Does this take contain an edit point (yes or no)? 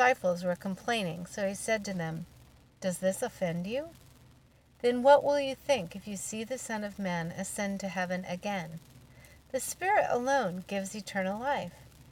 no